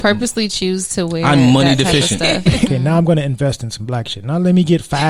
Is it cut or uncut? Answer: cut